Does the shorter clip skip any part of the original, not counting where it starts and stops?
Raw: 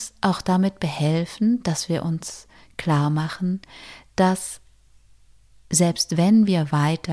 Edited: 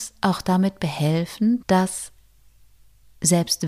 yes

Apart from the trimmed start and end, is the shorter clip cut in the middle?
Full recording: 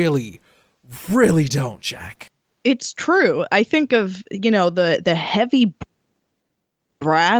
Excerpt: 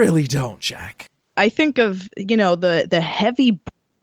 yes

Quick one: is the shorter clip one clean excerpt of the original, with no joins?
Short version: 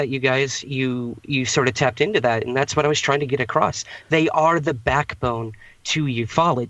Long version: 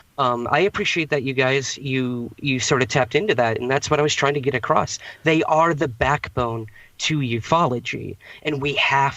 yes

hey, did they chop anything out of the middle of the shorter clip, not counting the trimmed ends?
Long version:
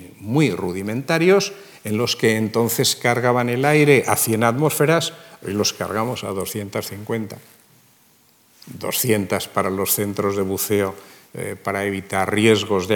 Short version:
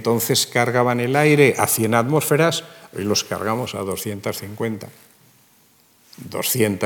no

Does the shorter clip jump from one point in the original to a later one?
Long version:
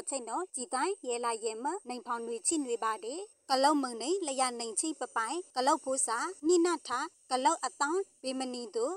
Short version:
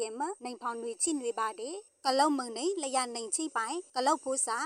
yes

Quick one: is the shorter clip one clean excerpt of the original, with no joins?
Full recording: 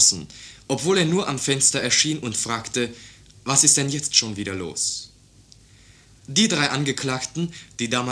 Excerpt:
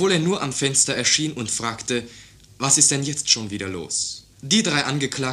no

